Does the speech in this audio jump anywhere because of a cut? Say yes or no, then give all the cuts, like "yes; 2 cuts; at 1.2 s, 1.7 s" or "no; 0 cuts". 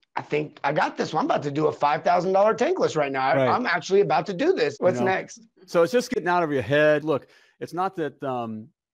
yes; 2 cuts; at 4.8 s, 7.0 s